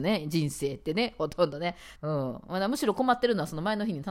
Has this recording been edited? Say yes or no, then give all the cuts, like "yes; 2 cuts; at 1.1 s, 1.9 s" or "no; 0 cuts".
yes; 1 cut; at 2.0 s